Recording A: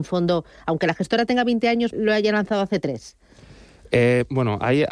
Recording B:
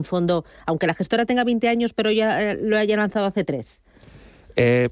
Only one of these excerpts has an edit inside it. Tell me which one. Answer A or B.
A